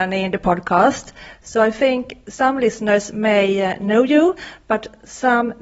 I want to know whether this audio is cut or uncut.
uncut